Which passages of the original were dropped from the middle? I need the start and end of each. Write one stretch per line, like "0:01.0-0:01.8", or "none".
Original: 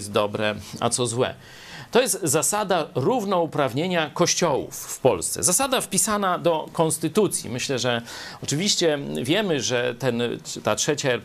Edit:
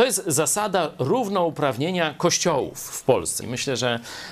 0:05.4-0:07.4